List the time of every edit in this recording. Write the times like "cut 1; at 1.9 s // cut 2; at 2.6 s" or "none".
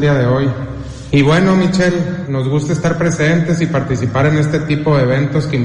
cut 1; at 1.1 s // cut 2; at 2.3 s